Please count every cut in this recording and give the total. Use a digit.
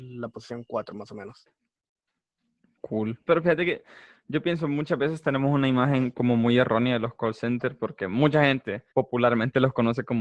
2